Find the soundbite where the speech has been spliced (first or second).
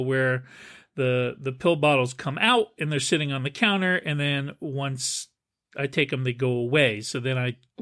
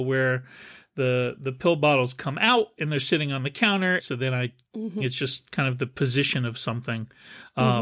second